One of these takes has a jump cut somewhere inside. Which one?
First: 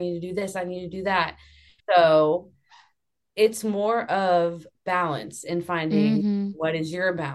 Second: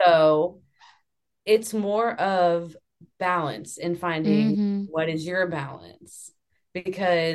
first; 2 cuts; at 1.8 s, 4.7 s

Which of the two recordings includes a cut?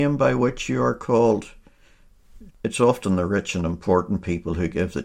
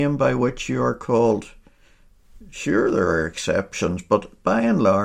first; 1 cut; at 2.5 s

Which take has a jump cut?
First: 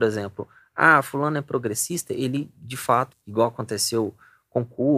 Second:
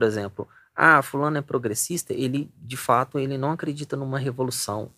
first; 1 cut; at 3.1 s

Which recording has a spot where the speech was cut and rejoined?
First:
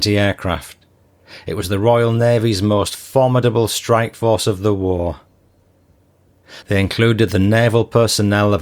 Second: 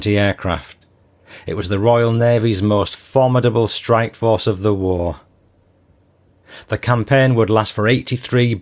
first; 1 cut; at 6.6 s

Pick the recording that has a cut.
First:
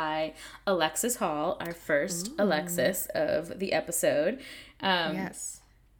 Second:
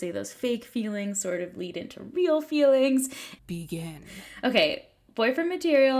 second; 1 cut; at 3.4 s

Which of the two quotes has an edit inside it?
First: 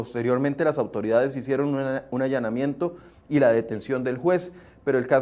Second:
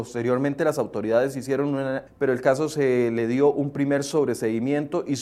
second; 1 cut; at 2.1 s

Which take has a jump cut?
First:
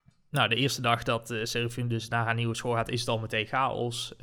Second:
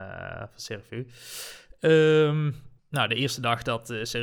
second; 1 cut; at 2.8 s

